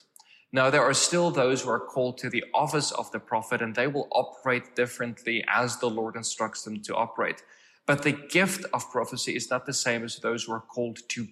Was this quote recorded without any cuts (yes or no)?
yes